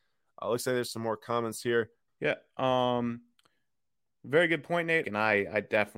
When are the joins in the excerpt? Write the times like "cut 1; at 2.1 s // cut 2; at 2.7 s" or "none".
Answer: cut 1; at 2.1 s // cut 2; at 5.0 s